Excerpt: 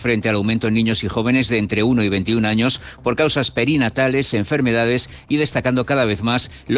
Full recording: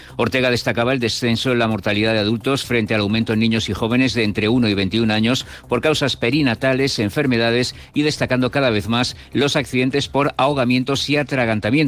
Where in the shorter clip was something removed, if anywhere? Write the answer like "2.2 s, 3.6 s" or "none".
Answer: none